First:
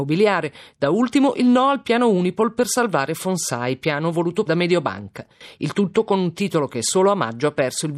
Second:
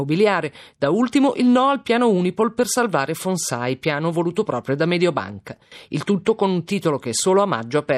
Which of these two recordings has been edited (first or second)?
first